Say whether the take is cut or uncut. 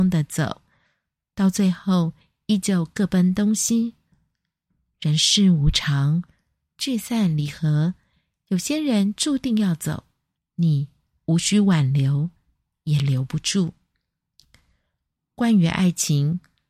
uncut